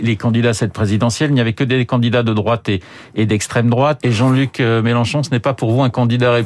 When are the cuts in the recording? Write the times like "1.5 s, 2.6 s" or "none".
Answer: 4.0 s